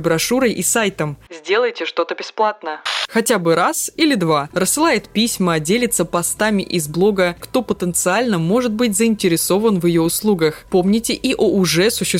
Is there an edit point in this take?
yes; 3 cuts; at 1.3 s, 4.5 s, 7.4 s

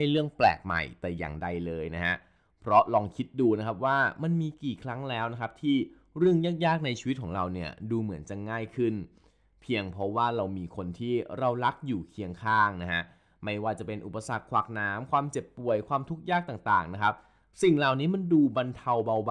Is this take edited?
no; 0 cuts

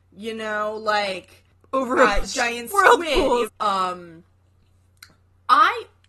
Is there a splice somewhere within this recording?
yes; 2 cuts; at 2.2 s, 3.5 s

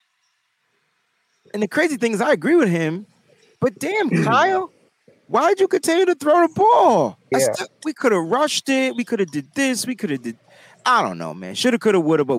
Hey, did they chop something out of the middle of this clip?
yes; 1 cut; at 7.3 s

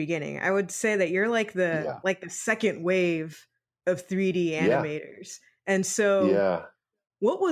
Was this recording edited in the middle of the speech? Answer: no; 0 cuts

